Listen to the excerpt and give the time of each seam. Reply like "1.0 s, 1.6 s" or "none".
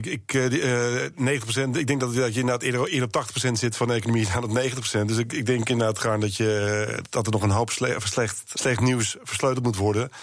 7.0 s, 8.5 s

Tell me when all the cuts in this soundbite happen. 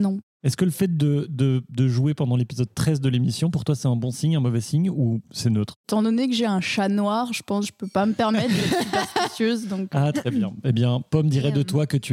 5.8 s

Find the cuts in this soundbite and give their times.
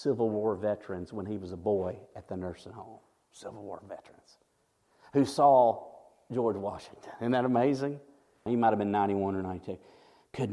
8.5 s

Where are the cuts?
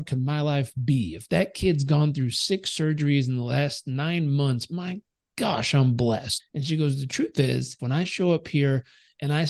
6.4 s, 7.8 s

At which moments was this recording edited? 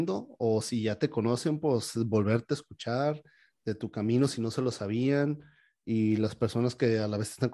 none

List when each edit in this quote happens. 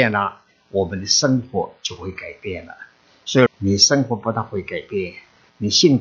3.5 s

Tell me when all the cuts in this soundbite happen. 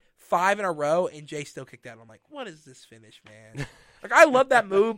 none

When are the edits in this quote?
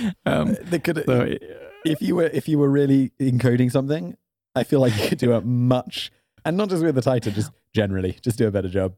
none

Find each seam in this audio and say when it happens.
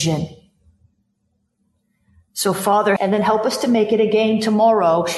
3.0 s

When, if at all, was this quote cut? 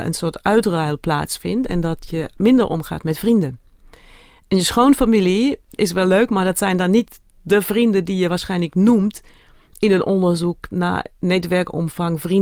none

